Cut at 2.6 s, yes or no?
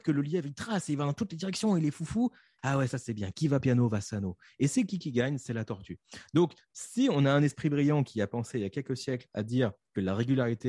yes